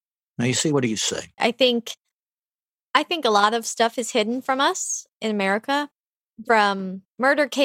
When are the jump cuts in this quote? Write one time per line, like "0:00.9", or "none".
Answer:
0:01.4
0:05.1
0:06.4

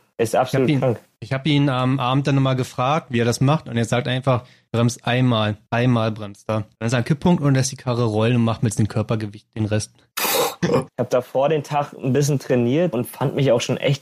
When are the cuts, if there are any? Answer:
0:10.9
0:12.9

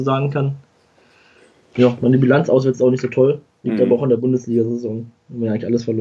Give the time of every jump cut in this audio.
none

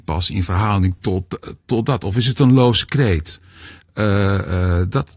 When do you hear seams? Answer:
none

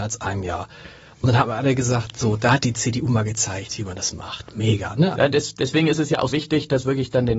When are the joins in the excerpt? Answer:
0:05.1
0:06.3

